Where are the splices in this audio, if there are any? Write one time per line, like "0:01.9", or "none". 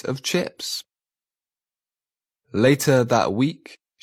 none